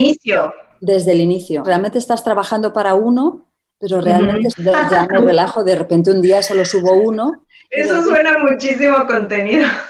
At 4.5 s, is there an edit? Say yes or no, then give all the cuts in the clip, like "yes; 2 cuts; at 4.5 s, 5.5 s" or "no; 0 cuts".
yes; 2 cuts; at 1.6 s, 4.5 s